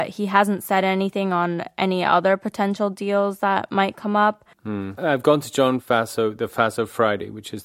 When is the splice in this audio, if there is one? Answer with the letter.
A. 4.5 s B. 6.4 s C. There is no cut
A